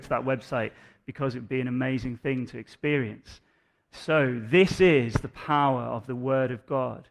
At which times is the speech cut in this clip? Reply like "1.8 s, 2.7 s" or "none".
none